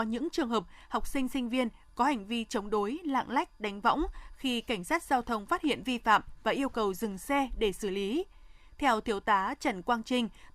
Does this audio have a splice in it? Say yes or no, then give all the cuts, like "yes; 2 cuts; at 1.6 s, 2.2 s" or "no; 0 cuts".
no; 0 cuts